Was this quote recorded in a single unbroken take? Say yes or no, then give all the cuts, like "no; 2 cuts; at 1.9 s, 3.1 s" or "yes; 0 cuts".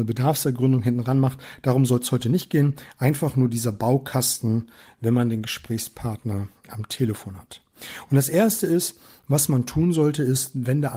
yes; 0 cuts